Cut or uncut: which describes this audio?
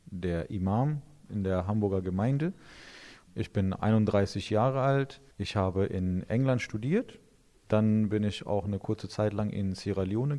uncut